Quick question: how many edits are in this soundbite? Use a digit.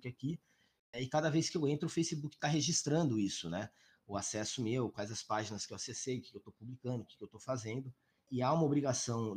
0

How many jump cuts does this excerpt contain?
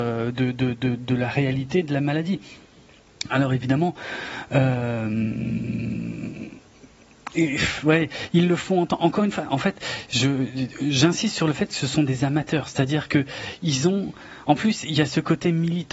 0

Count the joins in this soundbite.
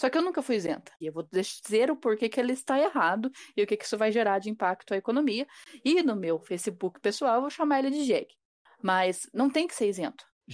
1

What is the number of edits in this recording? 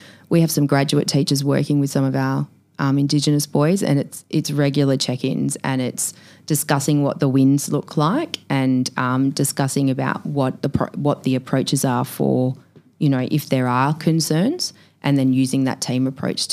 0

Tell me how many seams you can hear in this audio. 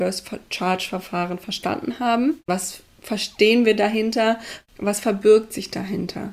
1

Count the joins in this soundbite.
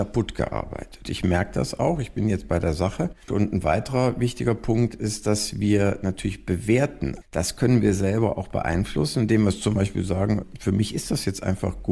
3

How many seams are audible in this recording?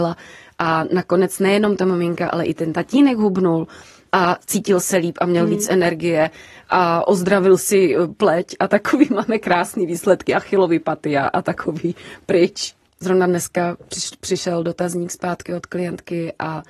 1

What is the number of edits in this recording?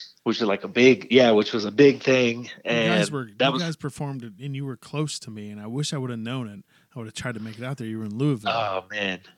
0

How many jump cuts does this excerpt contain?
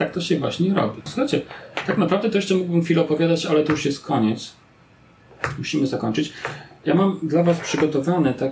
1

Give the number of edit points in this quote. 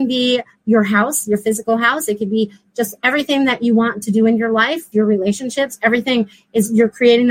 1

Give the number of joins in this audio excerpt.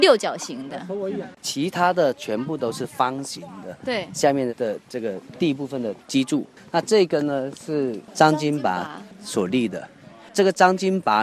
1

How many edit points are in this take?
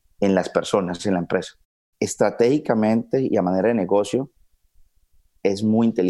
1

